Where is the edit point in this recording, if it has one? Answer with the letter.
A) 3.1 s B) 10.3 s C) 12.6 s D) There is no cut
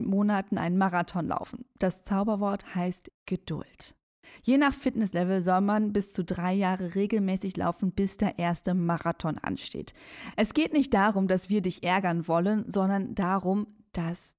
A